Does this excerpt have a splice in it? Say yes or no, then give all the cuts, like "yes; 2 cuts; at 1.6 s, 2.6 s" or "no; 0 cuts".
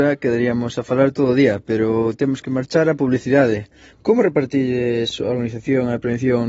yes; 1 cut; at 3.9 s